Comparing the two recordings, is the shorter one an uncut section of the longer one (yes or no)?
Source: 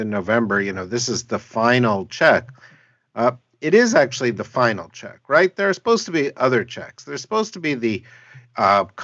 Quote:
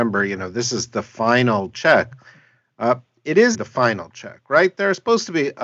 no